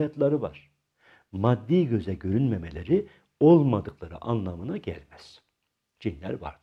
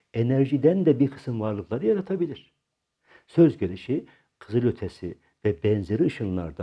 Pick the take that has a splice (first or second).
second